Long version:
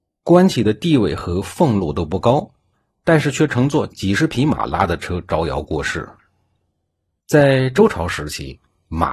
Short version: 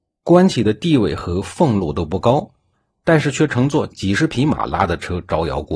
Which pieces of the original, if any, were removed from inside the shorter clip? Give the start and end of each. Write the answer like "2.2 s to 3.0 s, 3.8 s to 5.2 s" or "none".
none